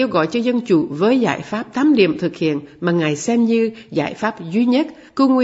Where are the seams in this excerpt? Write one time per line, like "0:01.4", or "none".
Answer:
none